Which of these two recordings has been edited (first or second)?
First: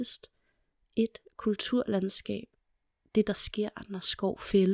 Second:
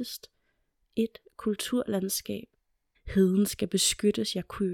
second